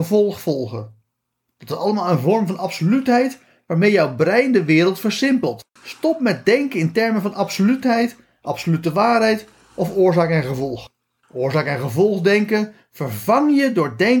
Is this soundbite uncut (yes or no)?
no